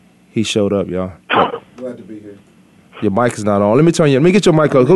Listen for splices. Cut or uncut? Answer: cut